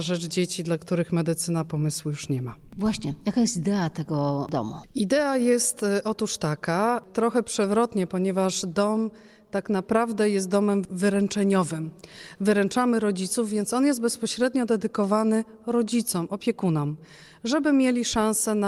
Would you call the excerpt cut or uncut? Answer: uncut